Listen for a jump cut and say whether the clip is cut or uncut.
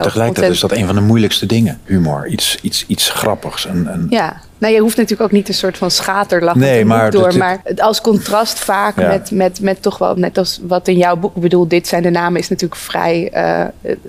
uncut